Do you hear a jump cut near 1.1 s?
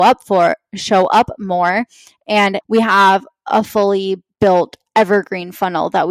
no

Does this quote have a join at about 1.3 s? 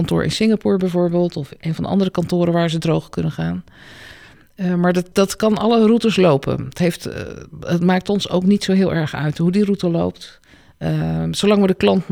no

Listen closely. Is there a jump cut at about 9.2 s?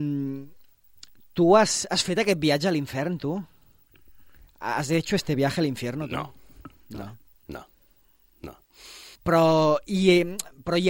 yes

